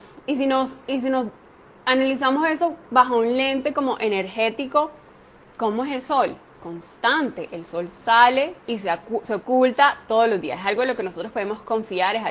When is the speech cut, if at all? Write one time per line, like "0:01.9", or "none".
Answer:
0:08.6